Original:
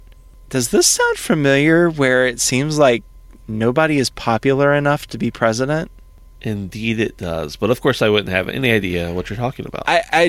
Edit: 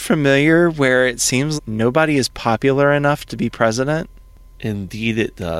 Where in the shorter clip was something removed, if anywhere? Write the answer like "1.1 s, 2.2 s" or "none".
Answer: 1.6 s